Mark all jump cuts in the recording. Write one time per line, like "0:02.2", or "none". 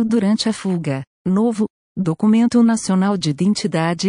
0:01.1